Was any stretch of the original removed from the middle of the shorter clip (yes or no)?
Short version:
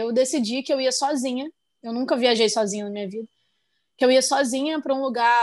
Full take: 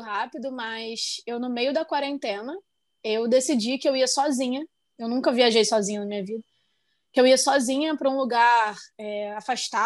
no